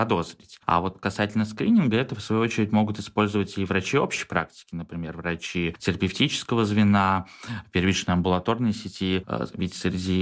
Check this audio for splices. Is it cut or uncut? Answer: uncut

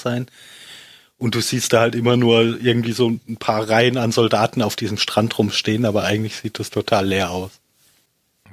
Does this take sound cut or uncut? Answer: uncut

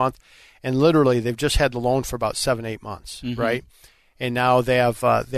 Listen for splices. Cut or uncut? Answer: uncut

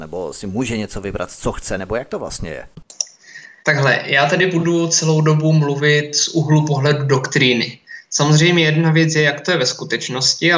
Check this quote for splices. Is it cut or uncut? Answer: cut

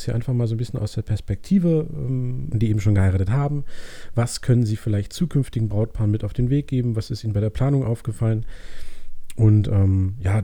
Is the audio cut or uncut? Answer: cut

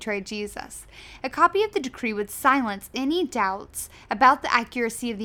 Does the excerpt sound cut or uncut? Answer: cut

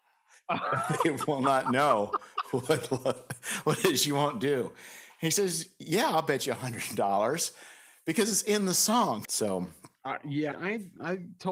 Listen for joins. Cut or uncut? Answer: cut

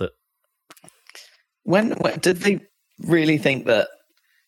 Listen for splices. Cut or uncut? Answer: uncut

